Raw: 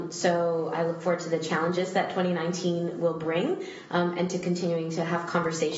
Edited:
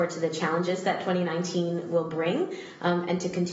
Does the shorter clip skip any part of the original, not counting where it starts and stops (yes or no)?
no